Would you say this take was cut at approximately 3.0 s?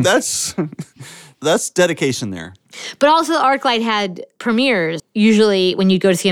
no; 1 cut; at 5.0 s

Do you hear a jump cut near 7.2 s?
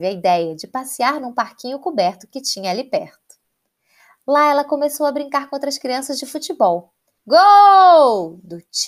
yes; 1 cut; at 7.2 s

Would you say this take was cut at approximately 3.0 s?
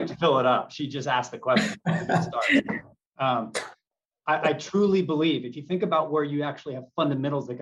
yes; 1 cut; at 3.0 s

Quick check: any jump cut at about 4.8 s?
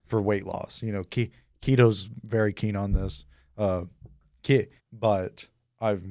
yes; 1 cut; at 4.8 s

